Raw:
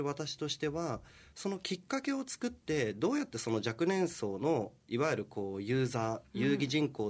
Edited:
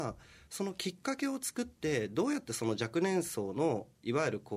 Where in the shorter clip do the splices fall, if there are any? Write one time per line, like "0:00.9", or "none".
none